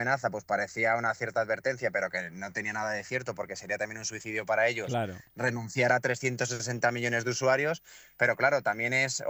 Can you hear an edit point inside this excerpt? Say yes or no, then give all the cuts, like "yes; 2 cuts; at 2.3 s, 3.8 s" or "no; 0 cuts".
no; 0 cuts